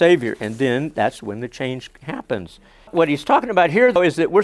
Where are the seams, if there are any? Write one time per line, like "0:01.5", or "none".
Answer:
none